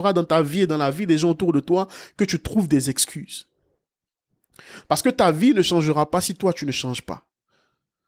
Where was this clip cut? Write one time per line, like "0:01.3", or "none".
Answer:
0:04.8